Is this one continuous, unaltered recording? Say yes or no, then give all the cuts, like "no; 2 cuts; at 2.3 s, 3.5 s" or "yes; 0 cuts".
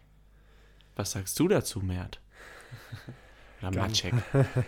yes; 0 cuts